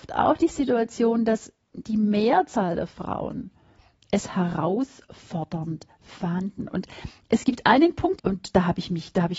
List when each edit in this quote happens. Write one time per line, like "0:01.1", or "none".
0:01.6
0:08.2